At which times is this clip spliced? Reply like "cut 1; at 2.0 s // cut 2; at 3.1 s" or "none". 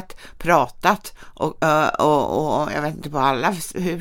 none